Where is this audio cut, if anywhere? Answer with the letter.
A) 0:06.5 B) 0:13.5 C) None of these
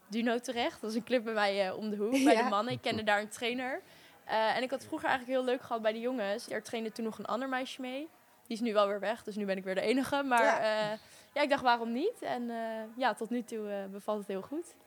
A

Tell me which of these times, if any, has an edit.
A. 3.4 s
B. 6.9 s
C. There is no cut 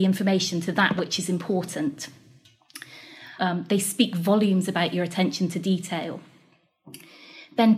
A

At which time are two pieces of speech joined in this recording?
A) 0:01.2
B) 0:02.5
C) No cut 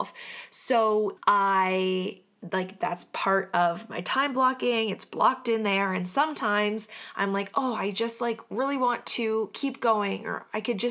A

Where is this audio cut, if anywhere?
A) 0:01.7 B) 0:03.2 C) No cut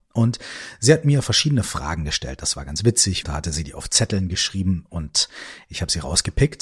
B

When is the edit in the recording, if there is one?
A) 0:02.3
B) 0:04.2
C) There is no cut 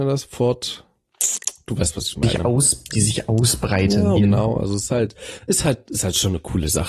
B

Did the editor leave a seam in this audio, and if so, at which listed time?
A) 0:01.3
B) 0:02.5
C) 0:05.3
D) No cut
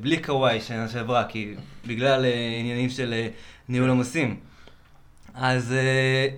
D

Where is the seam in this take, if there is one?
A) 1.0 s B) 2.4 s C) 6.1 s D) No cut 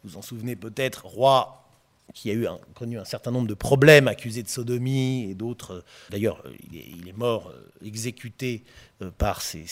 C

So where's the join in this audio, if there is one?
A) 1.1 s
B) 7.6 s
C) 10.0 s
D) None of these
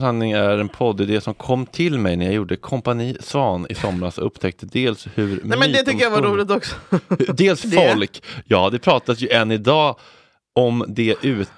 B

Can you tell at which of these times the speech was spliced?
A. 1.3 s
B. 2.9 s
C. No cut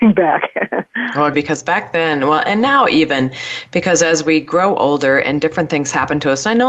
A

